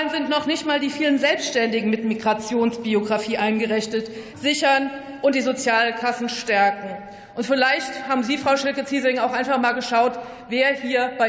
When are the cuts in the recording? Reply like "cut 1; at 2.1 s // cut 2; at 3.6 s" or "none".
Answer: cut 1; at 4.3 s